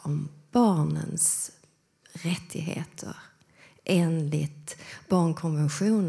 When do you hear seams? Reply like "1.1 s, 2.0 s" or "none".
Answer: none